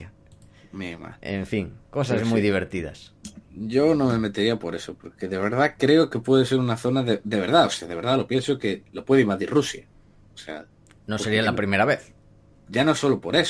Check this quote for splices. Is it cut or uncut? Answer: uncut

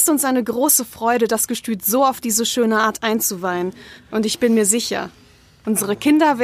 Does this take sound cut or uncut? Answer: uncut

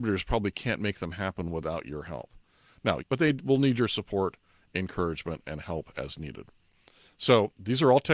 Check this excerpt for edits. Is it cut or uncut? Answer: cut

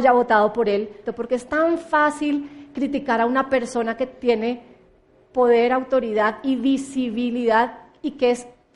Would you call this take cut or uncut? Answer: cut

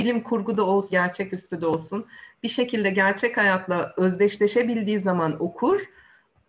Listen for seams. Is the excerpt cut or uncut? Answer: cut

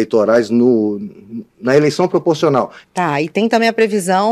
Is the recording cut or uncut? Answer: cut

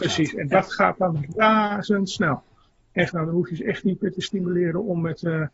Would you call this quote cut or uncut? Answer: cut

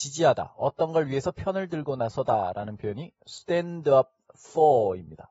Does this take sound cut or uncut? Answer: uncut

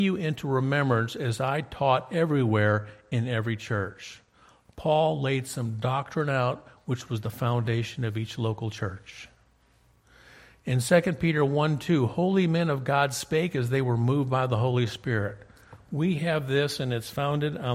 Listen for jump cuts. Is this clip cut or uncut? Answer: uncut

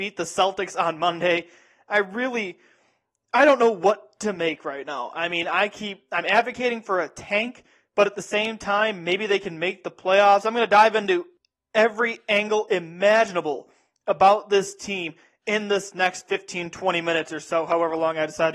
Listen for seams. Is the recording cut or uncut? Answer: uncut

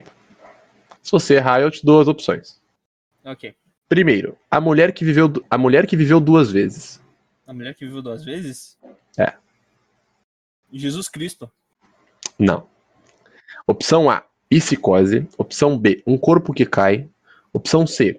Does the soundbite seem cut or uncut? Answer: cut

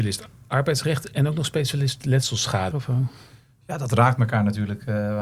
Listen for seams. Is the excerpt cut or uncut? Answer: cut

